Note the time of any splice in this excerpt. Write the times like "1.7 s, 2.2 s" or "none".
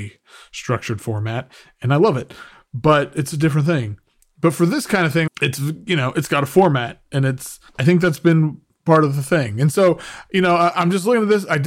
5.3 s, 7.7 s